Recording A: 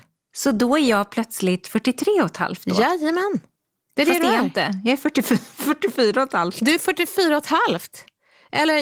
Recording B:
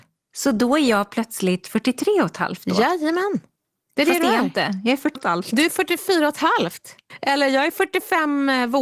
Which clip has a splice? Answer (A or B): B